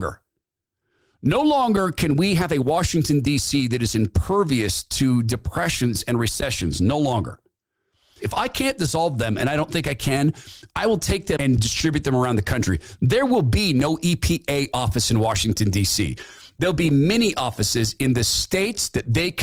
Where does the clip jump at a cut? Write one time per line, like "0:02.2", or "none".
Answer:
0:08.2
0:11.4